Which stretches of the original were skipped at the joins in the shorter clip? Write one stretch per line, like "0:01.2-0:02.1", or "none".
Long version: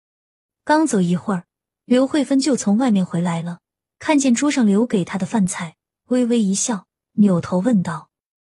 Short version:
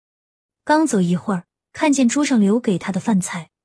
0:01.6-0:03.8

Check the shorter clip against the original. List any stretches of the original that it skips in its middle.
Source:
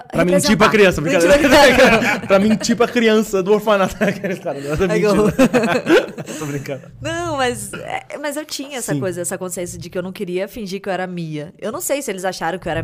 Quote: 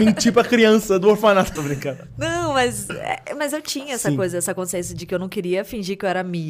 0:04.0-0:06.4

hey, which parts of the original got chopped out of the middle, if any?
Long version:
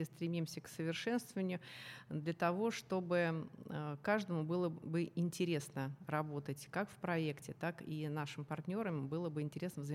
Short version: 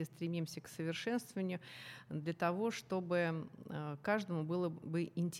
none

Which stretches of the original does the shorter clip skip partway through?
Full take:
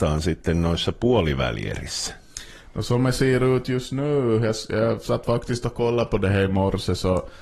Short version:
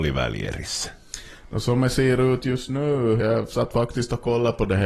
0:04.4-0:04.7

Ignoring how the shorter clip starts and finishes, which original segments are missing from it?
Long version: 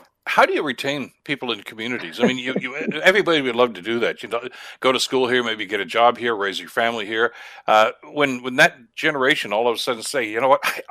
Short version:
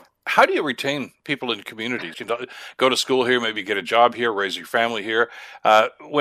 0:02.1-0:04.2

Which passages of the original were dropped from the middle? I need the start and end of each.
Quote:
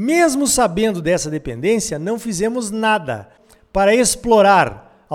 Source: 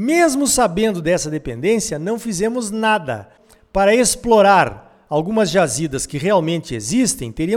none

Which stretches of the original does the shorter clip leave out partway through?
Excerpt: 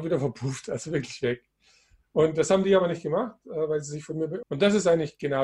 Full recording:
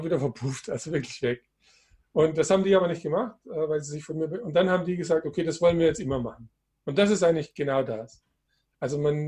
0:04.4-0:06.8

